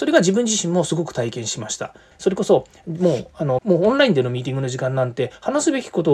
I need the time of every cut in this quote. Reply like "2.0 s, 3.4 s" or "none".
2.1 s, 3.6 s